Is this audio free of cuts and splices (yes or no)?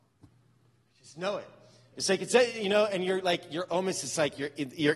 no